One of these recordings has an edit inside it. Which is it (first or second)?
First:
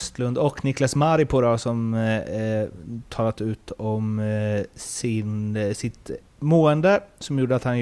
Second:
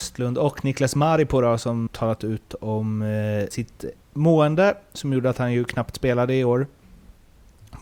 second